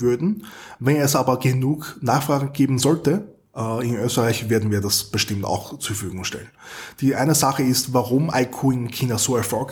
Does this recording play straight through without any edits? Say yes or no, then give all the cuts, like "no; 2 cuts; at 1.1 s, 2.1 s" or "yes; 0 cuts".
yes; 0 cuts